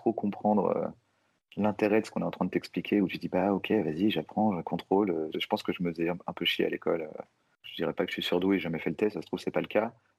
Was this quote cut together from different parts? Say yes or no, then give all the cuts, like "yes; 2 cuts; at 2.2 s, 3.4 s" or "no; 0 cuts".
yes; 1 cut; at 5.3 s